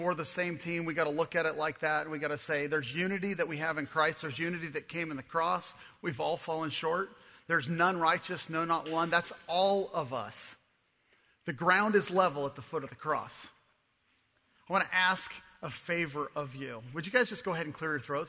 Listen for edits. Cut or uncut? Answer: uncut